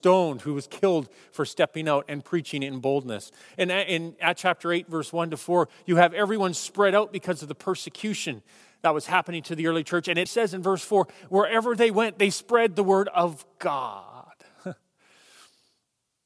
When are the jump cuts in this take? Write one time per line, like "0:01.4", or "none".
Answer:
0:10.3